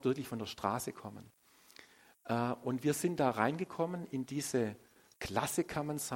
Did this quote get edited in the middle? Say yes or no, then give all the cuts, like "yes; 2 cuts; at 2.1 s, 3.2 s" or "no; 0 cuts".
no; 0 cuts